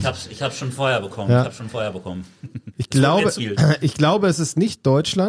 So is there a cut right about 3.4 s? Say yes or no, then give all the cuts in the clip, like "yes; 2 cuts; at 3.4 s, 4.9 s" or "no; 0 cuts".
yes; 1 cut; at 3.4 s